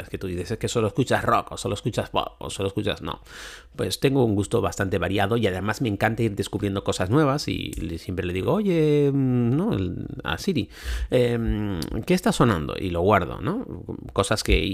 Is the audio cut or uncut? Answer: uncut